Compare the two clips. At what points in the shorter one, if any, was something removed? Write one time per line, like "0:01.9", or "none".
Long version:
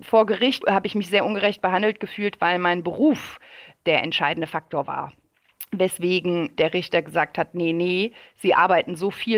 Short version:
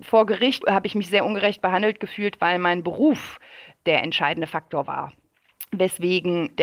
none